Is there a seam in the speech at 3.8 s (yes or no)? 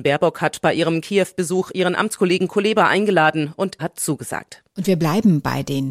yes